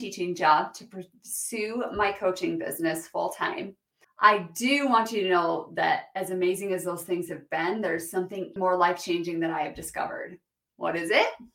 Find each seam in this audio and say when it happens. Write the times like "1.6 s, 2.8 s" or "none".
4.0 s, 8.6 s